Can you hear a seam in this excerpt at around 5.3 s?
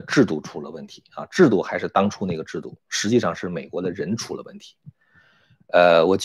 no; 0 cuts

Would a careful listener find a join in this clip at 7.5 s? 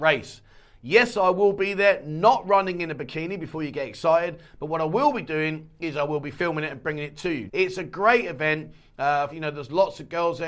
yes; 2 cuts; at 7.5 s, 9.3 s

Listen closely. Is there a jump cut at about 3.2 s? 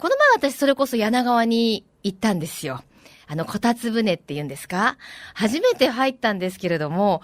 no; 0 cuts

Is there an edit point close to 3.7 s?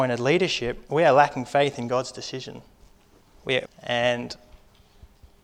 yes; 1 cut; at 3.7 s

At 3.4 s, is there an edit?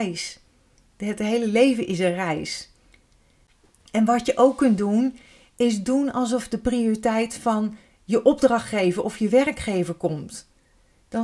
no; 0 cuts

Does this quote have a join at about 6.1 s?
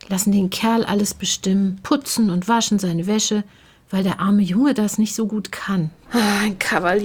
yes; 1 cut; at 6.1 s

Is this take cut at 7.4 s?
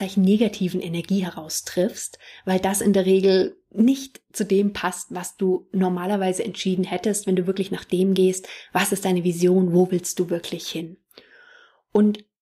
no; 0 cuts

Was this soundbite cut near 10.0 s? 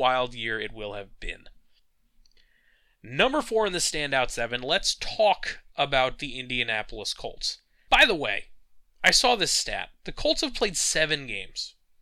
no; 1 cut; at 7.9 s

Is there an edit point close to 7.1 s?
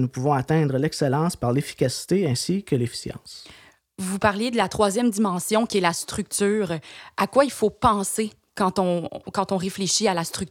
no; 1 cut; at 9.1 s

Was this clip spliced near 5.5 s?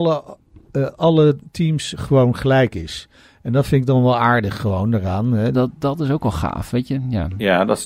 yes; 1 cut; at 5.5 s

